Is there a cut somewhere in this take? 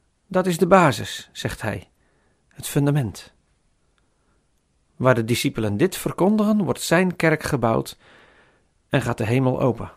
no; 0 cuts

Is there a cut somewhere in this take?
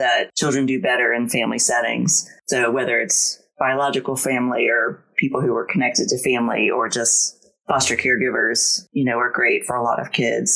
yes; 1 cut; at 8.9 s

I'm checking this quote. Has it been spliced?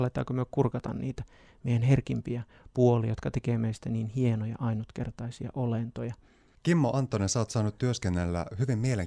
yes; 1 cut; at 6.5 s

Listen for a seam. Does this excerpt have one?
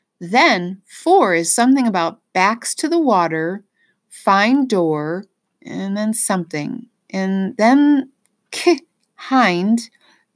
no; 0 cuts

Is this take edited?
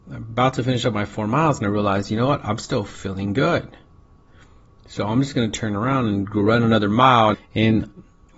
yes; 1 cut; at 7.3 s

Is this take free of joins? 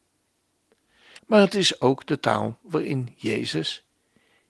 no; 1 cut; at 1.2 s

